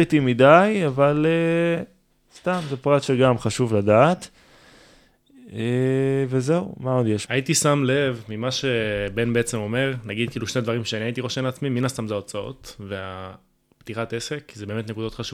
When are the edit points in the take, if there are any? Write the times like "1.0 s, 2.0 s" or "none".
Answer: 7.3 s